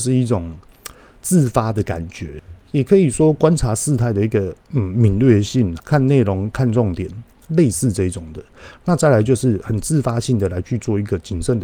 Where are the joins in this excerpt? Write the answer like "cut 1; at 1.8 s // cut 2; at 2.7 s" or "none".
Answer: cut 1; at 4.6 s // cut 2; at 5.8 s